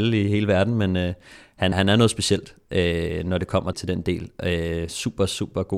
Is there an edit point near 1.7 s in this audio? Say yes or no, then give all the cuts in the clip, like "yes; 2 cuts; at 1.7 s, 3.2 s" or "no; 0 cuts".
yes; 2 cuts; at 1.7 s, 3.7 s